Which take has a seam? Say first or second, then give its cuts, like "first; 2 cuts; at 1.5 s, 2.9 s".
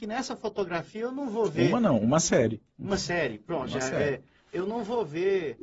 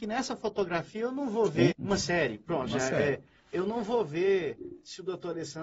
second; 1 cut; at 1.7 s